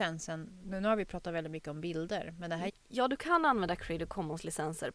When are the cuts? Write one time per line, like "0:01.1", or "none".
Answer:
0:02.7

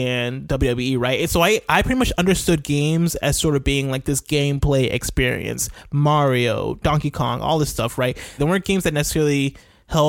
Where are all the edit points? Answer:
0:08.4

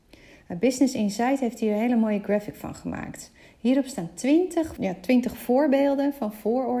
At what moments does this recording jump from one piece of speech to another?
0:04.8

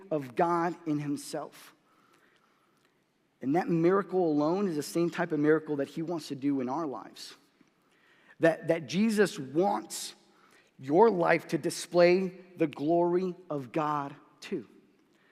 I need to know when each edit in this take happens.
none

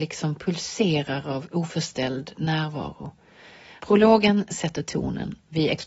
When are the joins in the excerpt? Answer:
0:03.8

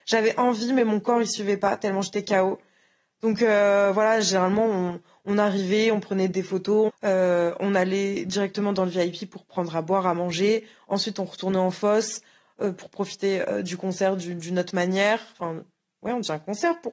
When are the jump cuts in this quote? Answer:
0:06.9

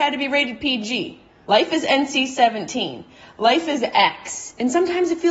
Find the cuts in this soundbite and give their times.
0:01.4

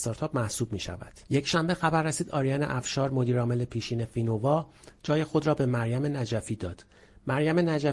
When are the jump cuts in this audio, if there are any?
0:01.3

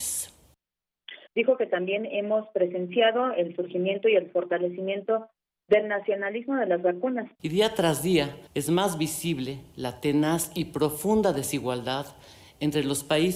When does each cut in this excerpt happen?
0:01.3
0:07.3
0:08.5

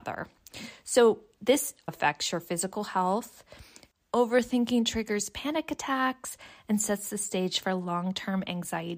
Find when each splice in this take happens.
0:01.9

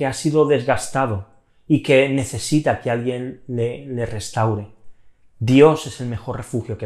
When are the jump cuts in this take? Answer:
none

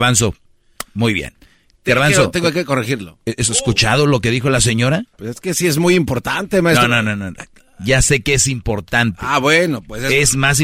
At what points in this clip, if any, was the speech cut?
0:05.1

